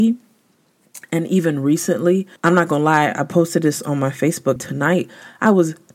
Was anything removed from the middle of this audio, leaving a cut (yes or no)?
yes